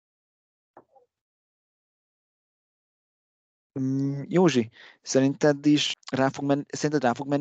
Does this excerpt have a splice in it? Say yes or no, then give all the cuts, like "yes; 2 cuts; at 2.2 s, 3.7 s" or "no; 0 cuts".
yes; 1 cut; at 5.9 s